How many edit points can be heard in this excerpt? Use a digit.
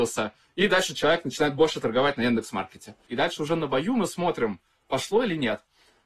1